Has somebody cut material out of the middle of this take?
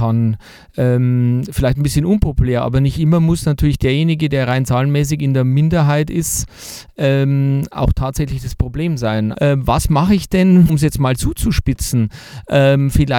yes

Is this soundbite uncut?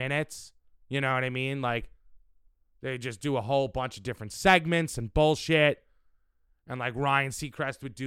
yes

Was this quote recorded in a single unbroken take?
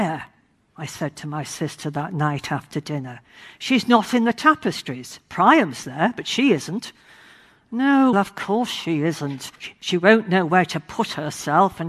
no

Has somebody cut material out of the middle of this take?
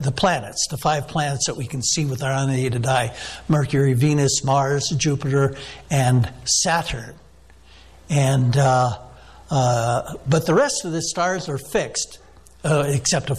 no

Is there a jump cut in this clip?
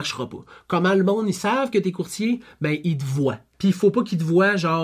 yes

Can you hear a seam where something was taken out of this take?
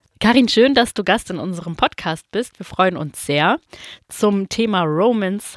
no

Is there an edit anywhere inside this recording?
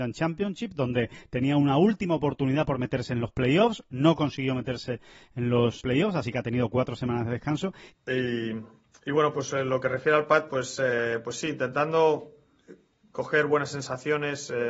yes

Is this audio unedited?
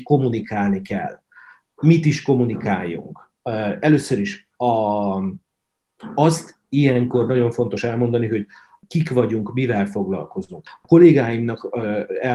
yes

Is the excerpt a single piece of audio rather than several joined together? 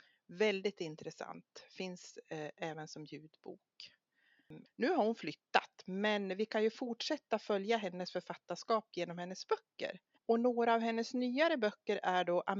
no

